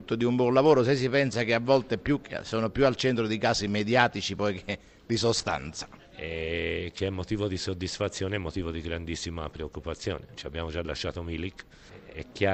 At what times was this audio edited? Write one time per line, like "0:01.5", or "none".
0:06.0